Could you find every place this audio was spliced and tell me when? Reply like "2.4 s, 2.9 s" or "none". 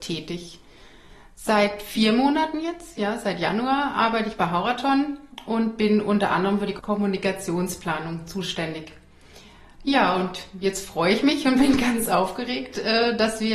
none